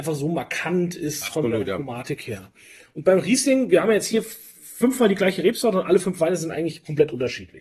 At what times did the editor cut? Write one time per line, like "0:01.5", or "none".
none